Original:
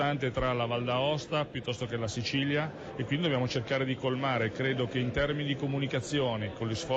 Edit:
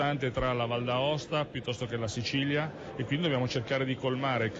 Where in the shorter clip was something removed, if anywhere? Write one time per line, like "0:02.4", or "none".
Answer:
none